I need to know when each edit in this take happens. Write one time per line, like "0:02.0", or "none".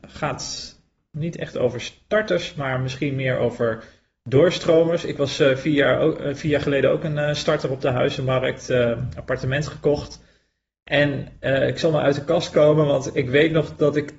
none